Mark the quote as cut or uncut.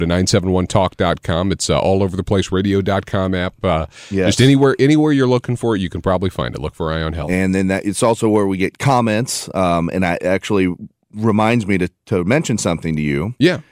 uncut